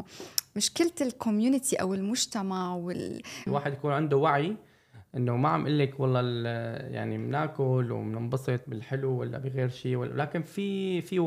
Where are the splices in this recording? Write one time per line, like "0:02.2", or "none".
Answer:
0:03.5